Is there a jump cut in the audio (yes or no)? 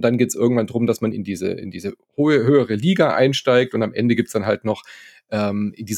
yes